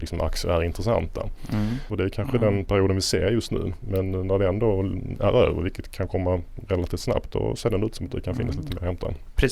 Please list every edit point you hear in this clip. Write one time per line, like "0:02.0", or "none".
0:01.9